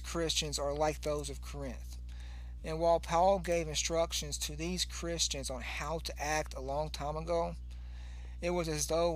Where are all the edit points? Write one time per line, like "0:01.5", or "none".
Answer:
none